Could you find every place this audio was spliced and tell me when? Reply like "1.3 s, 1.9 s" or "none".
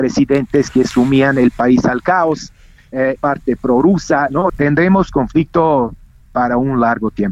3.2 s, 4.5 s